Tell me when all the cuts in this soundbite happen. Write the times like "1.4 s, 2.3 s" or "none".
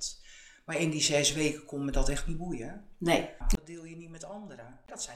3.4 s